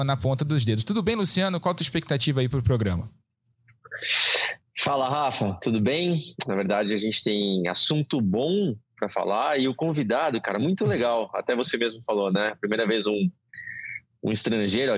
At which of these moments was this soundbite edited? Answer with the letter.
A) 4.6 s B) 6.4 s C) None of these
B